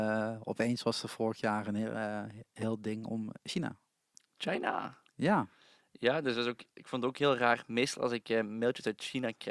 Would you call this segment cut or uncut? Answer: uncut